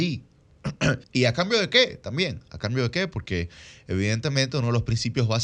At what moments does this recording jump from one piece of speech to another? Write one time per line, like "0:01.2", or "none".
0:01.0